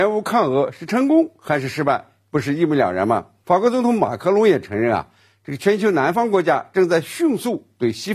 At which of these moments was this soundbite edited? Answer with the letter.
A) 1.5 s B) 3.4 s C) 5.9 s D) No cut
B